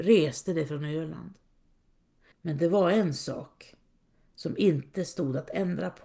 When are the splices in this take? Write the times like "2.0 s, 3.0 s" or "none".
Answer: 2.3 s